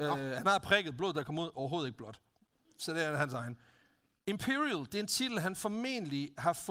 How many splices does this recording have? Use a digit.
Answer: 0